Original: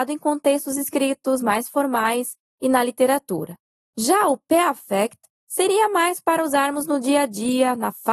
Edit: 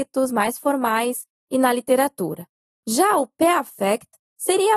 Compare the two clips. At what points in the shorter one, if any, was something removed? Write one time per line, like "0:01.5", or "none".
none